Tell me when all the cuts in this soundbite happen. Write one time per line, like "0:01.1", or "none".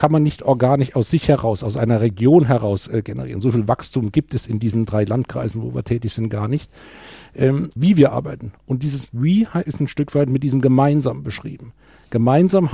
0:07.8
0:09.7